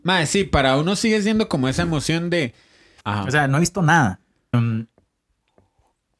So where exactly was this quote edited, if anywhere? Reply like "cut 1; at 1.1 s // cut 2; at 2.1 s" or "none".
cut 1; at 3.0 s // cut 2; at 4.5 s